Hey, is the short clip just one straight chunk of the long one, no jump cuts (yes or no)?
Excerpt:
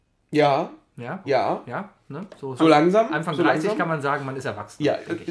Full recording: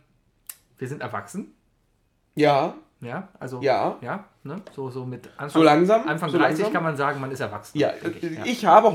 no